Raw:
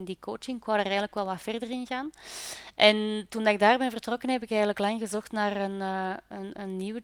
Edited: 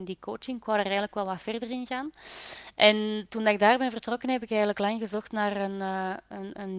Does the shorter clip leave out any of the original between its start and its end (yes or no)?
no